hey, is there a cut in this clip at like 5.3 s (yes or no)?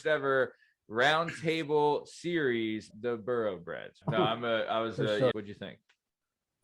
yes